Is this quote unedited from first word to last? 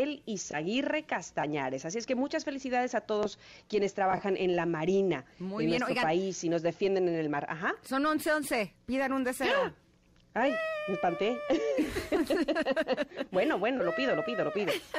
yes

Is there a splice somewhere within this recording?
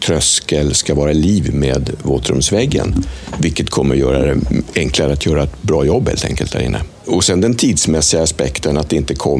yes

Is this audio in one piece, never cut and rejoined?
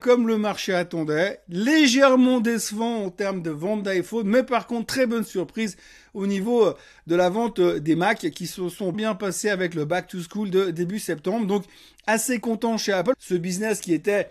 no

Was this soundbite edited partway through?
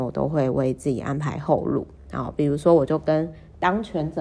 no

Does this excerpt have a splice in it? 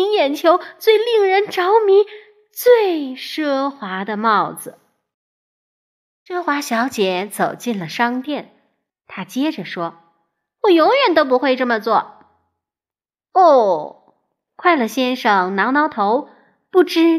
yes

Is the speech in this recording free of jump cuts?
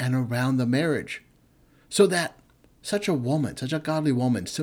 yes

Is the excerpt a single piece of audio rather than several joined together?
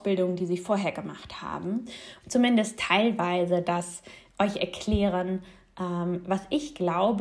no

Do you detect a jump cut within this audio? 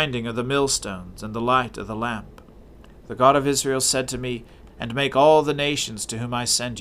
yes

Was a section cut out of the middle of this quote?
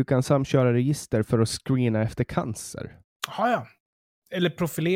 no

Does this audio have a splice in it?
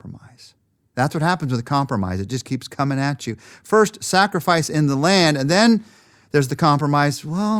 no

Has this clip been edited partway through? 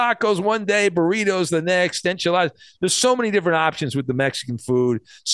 no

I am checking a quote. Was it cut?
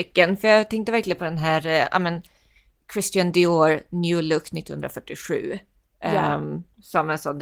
no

